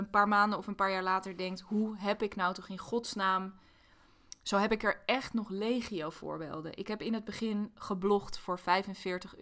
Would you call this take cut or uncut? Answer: uncut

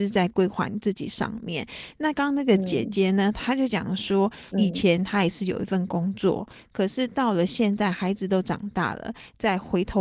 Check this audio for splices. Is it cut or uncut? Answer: cut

